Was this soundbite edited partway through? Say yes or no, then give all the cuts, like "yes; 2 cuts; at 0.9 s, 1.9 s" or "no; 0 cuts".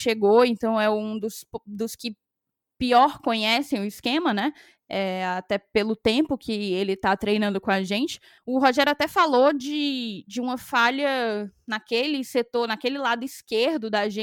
yes; 1 cut; at 8.4 s